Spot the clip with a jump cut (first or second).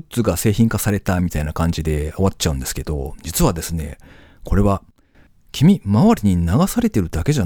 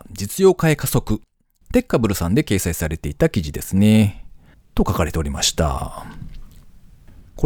second